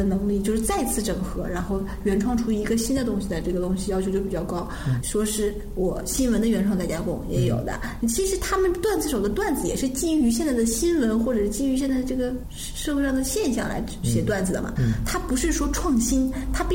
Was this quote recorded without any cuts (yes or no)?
no